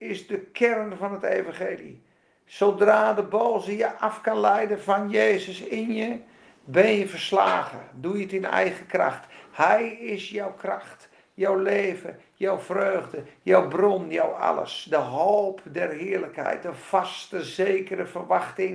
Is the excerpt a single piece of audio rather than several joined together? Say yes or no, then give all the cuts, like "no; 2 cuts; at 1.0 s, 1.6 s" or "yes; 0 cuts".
yes; 0 cuts